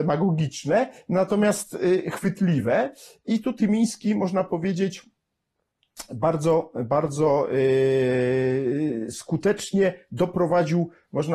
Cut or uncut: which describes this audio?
uncut